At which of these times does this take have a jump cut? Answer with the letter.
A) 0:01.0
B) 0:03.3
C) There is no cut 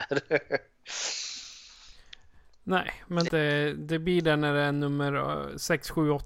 B